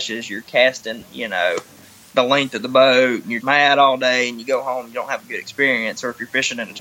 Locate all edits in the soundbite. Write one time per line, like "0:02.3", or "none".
0:03.4